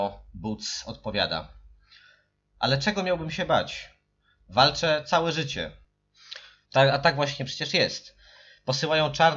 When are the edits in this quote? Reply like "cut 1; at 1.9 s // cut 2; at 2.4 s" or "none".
cut 1; at 6.6 s